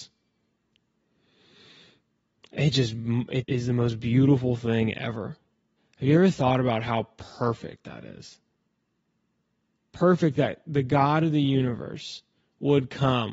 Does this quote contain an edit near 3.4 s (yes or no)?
yes